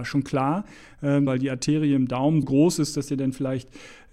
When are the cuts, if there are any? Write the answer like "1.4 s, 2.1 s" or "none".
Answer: 1.3 s, 2.4 s

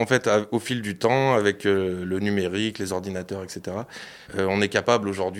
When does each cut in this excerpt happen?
4.2 s

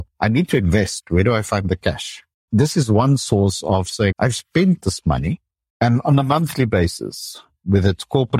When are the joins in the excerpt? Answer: 4.1 s, 5.7 s

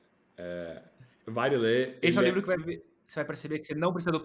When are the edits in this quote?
none

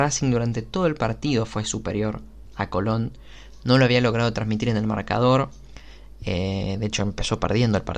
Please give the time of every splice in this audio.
none

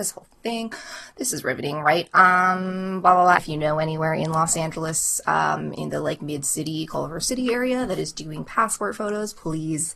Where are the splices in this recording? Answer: 3.4 s

